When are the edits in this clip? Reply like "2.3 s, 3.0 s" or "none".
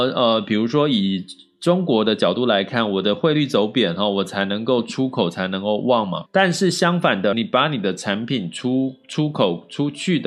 6.3 s, 7.3 s